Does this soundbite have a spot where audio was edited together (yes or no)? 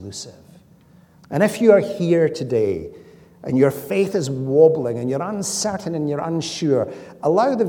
yes